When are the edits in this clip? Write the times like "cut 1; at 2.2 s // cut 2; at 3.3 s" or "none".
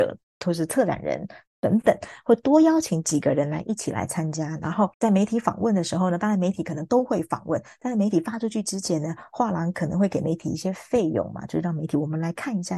cut 1; at 4.9 s